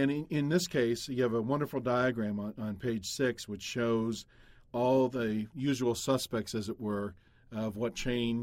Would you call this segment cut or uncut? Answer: uncut